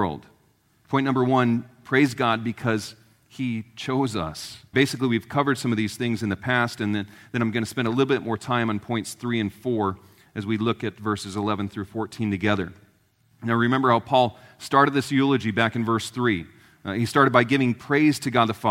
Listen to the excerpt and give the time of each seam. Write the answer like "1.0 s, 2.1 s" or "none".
4.7 s